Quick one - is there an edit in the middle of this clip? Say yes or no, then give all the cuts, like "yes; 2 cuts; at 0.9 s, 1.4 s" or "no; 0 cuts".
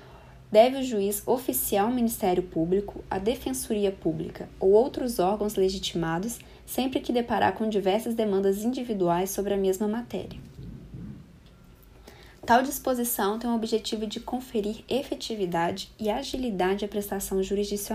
no; 0 cuts